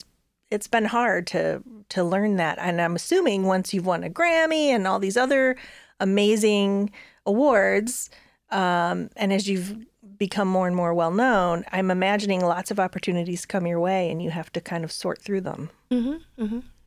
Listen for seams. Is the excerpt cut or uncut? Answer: uncut